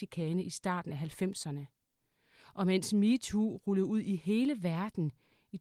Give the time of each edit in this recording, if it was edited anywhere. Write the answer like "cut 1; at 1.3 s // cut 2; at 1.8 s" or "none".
none

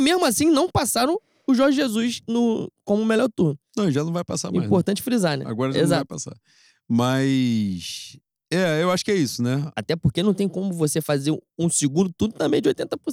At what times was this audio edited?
cut 1; at 9.7 s

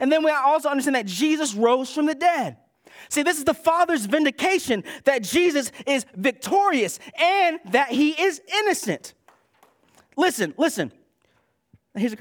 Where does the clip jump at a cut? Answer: none

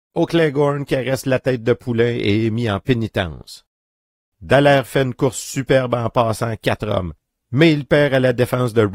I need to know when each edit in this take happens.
none

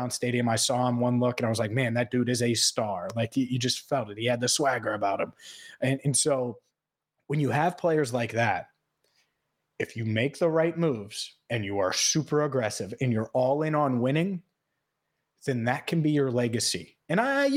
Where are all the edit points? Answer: none

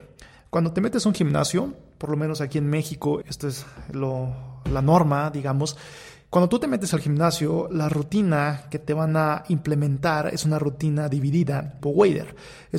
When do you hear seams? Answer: cut 1; at 3.2 s // cut 2; at 11.8 s

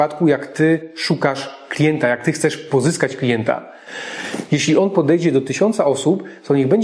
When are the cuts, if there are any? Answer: cut 1; at 4.5 s

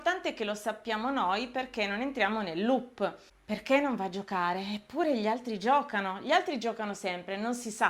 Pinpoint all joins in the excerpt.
none

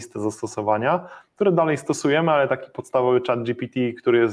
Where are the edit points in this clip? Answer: none

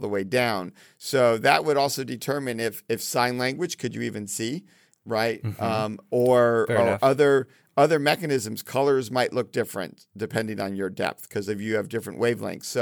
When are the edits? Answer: none

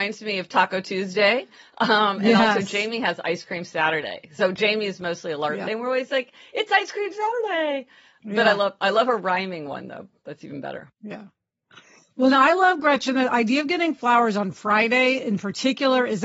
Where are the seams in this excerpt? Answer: cut 1; at 5.7 s

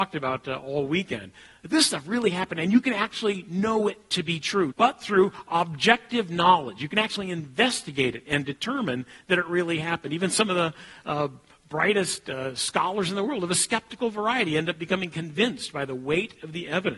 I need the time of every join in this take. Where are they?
cut 1; at 4.7 s

